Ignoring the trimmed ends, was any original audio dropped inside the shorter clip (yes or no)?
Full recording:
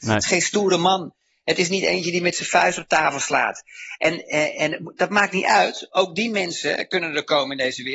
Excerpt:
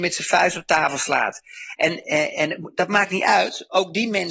no